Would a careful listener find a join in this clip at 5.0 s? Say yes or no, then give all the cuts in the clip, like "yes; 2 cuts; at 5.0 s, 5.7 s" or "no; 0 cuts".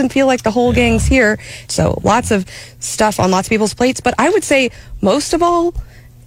no; 1 cut; at 1.6 s